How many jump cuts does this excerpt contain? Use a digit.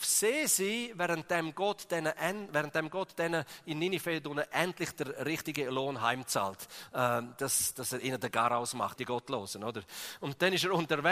2